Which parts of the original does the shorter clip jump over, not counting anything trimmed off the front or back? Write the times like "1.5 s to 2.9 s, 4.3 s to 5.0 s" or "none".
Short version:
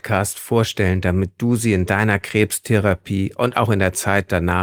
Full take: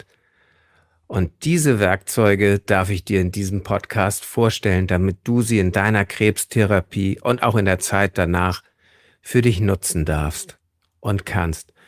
none